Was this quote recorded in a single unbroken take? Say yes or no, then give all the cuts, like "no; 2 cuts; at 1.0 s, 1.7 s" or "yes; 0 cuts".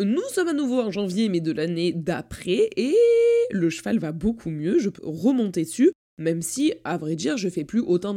no; 1 cut; at 5.0 s